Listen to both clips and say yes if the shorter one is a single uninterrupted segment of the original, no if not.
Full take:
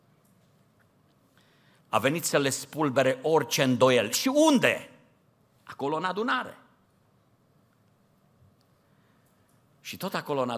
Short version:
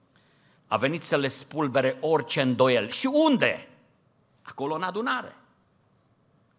yes